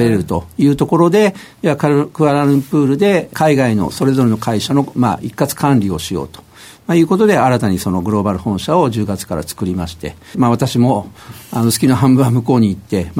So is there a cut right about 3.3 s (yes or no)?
yes